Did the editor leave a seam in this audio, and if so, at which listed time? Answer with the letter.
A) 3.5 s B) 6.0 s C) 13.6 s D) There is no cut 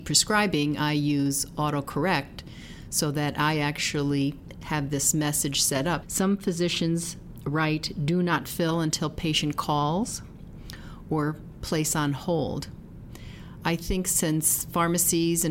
B